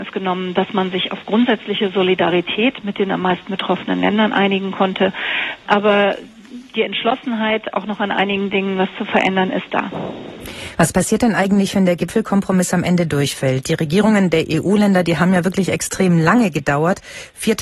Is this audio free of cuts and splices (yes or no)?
yes